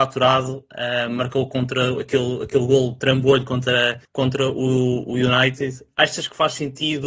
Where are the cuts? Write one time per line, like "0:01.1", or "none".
none